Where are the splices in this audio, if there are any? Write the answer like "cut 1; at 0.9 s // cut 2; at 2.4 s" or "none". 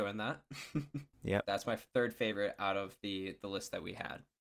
cut 1; at 1.4 s